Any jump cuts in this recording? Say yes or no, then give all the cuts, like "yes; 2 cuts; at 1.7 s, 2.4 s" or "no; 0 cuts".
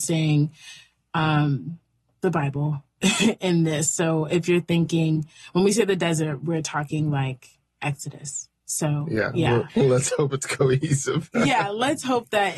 yes; 1 cut; at 9.7 s